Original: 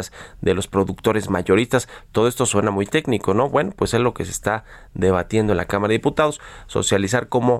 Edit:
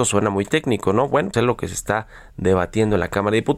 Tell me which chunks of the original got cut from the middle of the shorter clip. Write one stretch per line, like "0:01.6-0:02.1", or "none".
0:03.7-0:03.9